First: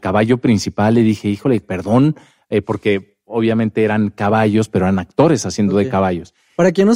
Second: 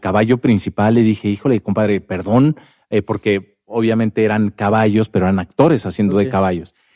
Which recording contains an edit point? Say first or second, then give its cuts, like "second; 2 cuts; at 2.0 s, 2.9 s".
first; 1 cut; at 1.6 s